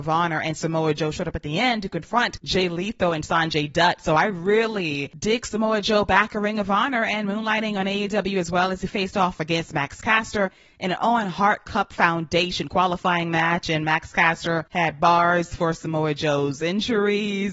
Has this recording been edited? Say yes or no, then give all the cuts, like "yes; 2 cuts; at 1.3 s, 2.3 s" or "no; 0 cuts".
no; 0 cuts